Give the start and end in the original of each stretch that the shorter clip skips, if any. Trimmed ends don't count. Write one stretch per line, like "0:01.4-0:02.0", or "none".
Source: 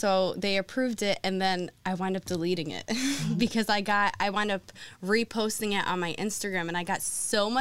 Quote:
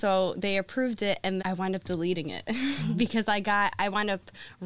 0:01.4-0:01.8